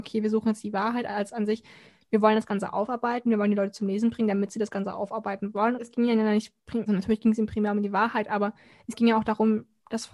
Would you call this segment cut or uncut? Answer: cut